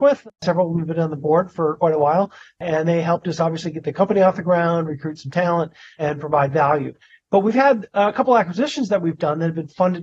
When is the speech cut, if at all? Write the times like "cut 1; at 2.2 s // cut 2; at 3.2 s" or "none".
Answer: none